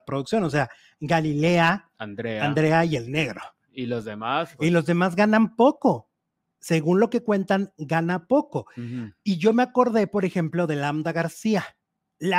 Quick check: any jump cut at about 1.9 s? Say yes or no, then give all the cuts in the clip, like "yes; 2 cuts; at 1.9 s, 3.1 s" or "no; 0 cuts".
no; 0 cuts